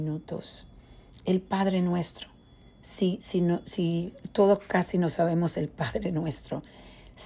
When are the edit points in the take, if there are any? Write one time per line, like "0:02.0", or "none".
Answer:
none